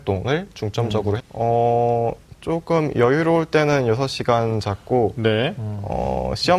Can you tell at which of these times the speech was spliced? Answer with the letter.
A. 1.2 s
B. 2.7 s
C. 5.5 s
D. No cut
A